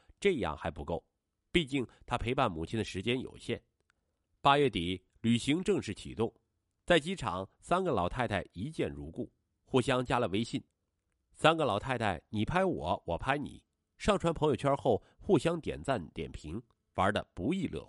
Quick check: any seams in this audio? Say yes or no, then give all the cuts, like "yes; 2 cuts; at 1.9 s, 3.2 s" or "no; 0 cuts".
yes; 1 cut; at 4.3 s